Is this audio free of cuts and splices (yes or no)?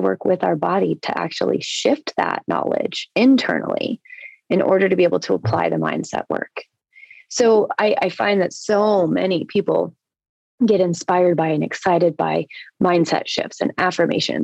yes